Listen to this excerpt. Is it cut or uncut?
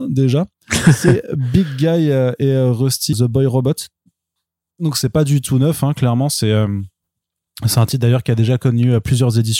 cut